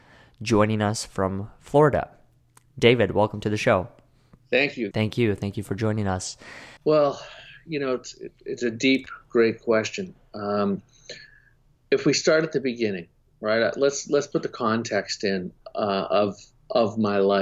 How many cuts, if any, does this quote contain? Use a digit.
2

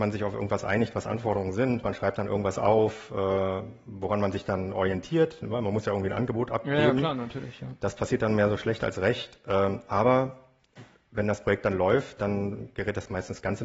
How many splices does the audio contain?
1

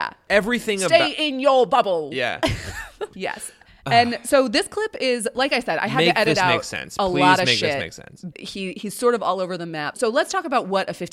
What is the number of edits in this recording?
2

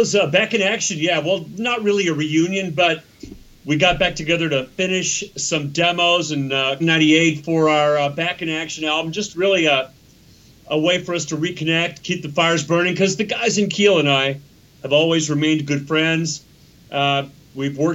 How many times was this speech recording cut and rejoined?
1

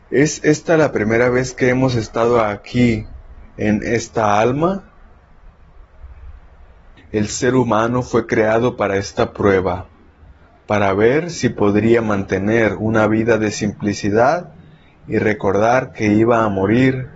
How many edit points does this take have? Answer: 1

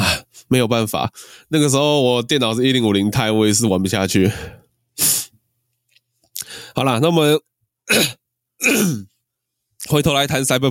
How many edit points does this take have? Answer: 0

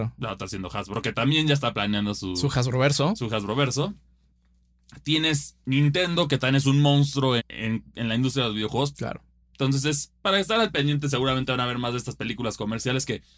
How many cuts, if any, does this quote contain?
2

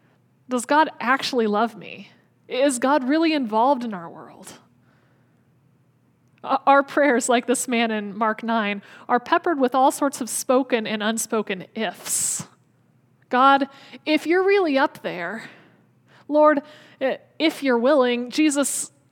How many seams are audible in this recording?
0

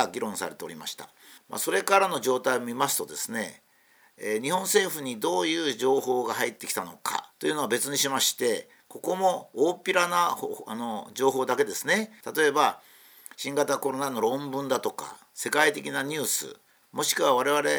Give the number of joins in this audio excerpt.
3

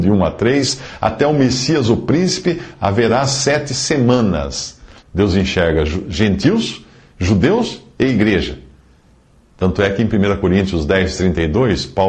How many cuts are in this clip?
1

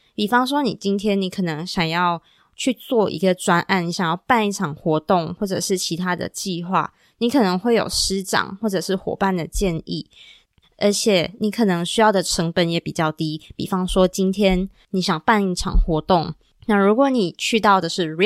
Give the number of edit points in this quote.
1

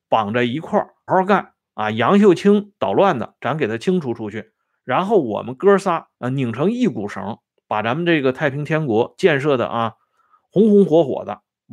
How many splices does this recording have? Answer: 2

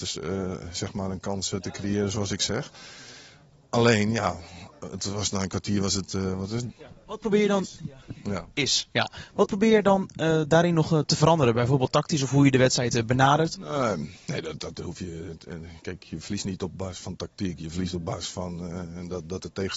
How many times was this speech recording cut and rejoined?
2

